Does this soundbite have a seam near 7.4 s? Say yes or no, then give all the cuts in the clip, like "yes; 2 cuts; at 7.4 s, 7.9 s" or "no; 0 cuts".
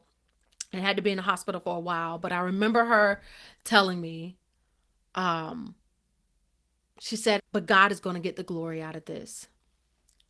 yes; 1 cut; at 7.4 s